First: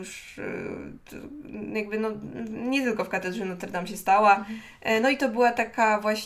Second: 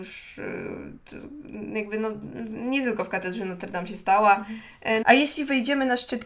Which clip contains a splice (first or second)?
second